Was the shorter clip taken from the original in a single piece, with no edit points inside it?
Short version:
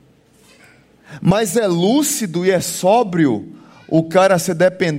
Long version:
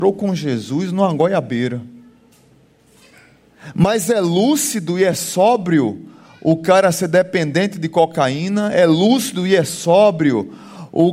yes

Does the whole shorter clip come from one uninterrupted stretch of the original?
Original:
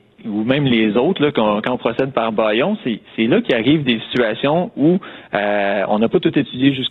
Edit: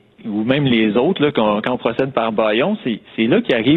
yes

